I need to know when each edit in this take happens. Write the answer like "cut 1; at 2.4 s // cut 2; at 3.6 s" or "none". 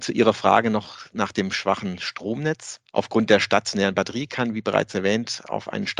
none